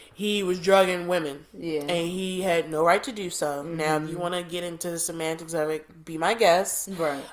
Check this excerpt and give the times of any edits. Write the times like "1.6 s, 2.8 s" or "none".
none

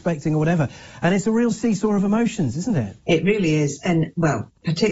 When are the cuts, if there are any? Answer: 3.0 s

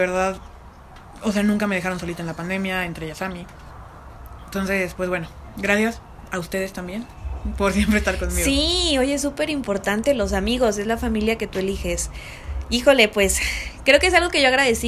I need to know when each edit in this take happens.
none

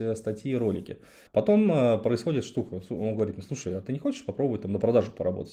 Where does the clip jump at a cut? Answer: 1.3 s

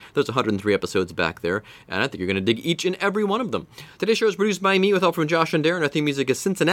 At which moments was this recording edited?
none

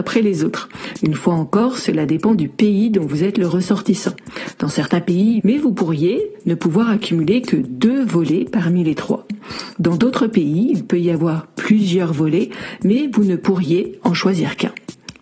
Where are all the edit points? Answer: 5.4 s

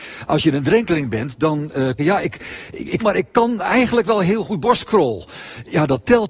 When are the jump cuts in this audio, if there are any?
2.0 s, 3.0 s

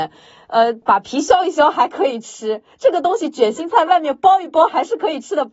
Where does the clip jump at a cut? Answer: none

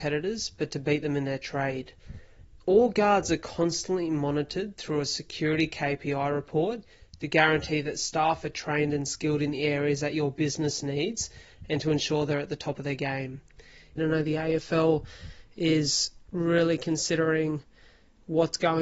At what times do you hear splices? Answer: 14.0 s

